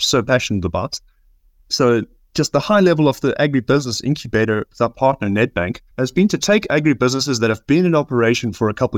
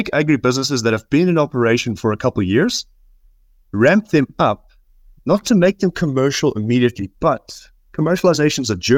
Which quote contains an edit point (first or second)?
first